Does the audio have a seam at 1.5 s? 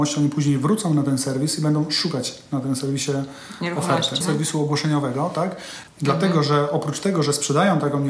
no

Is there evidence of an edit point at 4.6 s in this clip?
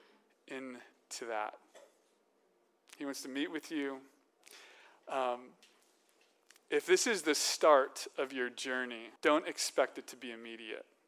no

